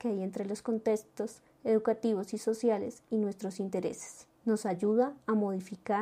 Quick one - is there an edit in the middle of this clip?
yes; 1 cut; at 4.4 s

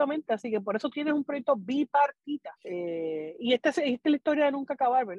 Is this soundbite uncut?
no; 1 cut; at 2.6 s

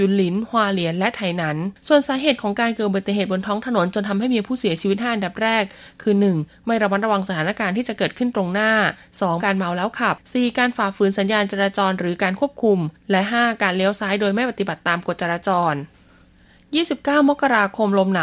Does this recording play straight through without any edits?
no; 1 cut; at 9.4 s

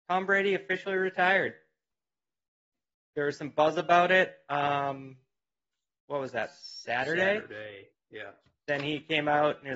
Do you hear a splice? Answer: no; 0 cuts

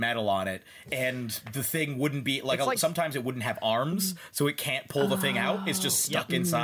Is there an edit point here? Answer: no; 0 cuts

